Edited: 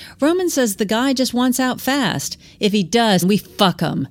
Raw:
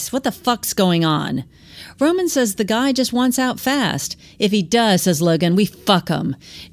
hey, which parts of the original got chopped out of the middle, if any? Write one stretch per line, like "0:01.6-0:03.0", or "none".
0:05.0-0:05.5